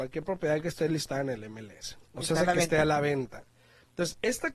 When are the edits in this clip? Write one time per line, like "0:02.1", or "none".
none